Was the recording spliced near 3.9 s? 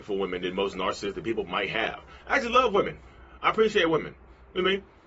no; 1 cut; at 2.2 s

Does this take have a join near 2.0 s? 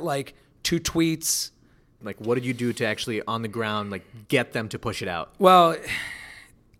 yes; 1 cut; at 2.0 s

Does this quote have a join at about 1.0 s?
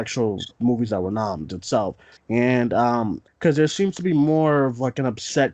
no; 2 cuts; at 2.2 s, 3.3 s

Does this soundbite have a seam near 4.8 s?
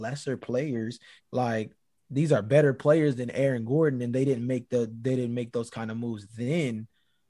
no; 1 cut; at 1.2 s

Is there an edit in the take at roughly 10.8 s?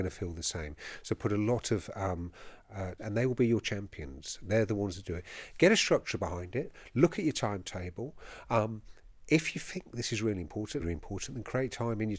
yes; 2 cuts; at 3.0 s, 10.8 s

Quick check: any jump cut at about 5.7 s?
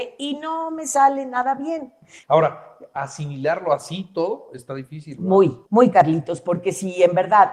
yes; 2 cuts; at 2.2 s, 5.7 s

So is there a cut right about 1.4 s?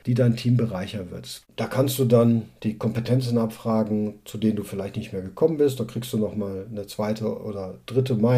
yes; 1 cut; at 1.4 s

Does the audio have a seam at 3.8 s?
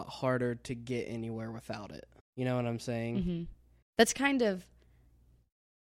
yes; 2 cuts; at 2.2 s, 3.8 s

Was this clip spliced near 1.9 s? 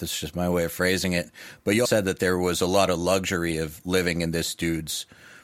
yes; 1 cut; at 1.9 s

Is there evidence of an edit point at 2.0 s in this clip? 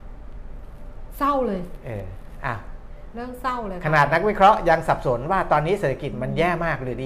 no; 0 cuts

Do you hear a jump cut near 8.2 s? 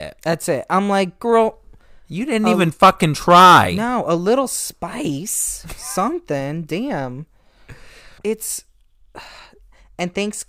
yes; 1 cut; at 8.2 s

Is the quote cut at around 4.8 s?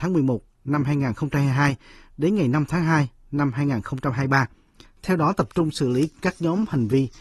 yes; 1 cut; at 4.8 s

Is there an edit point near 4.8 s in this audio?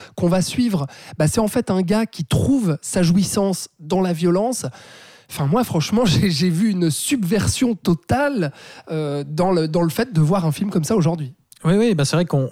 no; 0 cuts

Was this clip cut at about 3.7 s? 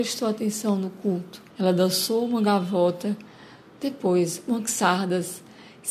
no; 1 cut; at 1.5 s

